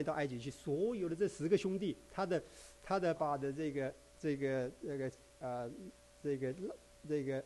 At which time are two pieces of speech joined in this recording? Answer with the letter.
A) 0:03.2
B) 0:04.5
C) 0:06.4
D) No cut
A